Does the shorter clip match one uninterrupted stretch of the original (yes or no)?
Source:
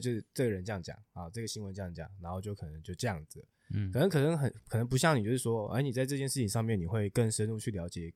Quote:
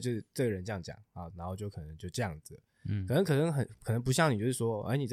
no